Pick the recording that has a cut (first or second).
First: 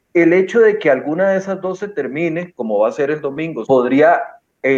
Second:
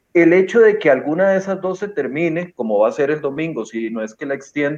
first